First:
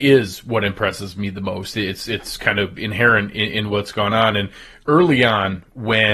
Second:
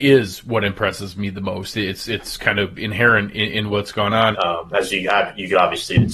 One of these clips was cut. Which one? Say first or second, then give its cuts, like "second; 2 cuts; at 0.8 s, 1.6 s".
second; 1 cut; at 4.3 s